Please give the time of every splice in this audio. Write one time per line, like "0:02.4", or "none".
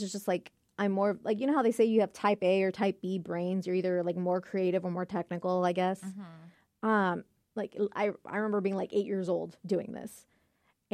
0:07.4